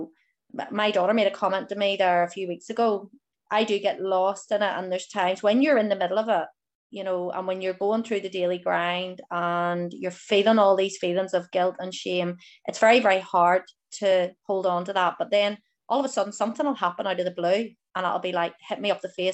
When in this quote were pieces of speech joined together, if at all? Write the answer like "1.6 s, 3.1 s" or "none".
3.3 s